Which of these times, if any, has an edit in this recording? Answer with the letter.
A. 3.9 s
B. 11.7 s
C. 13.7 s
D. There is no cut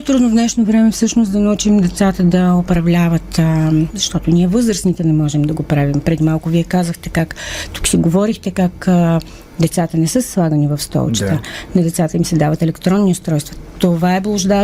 A